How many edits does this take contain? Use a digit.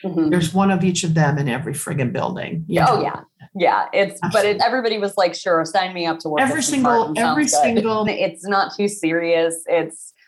2